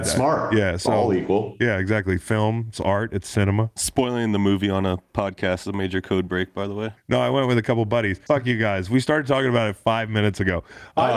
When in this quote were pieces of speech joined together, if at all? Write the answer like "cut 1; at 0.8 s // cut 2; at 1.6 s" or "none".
cut 1; at 7.0 s // cut 2; at 8.3 s

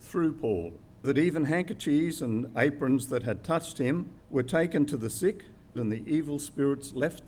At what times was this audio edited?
cut 1; at 1.0 s // cut 2; at 4.2 s // cut 3; at 5.7 s

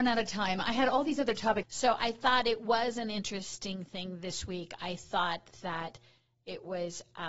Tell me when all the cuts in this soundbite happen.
cut 1; at 1.6 s

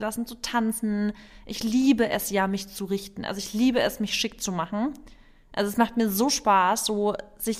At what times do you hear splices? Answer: none

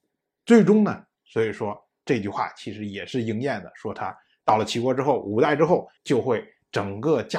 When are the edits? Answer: cut 1; at 1.1 s // cut 2; at 6.0 s

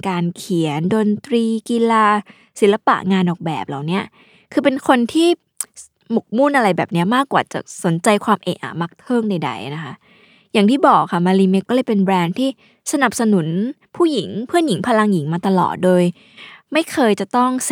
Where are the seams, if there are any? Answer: cut 1; at 11.7 s

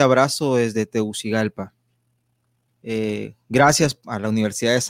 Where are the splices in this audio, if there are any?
cut 1; at 2.7 s

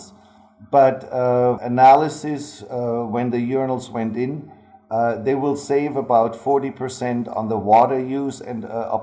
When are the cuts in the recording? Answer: cut 1; at 1.6 s

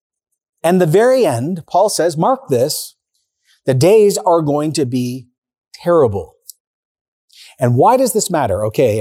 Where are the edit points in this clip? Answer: none

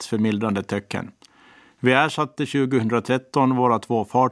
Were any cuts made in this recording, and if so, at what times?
none

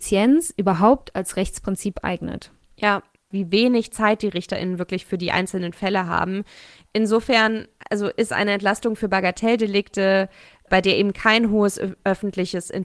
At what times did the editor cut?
cut 1; at 3.3 s

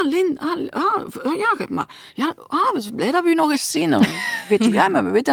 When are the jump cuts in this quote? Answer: none

